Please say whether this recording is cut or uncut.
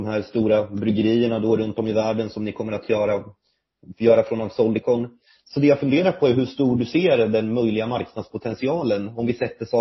uncut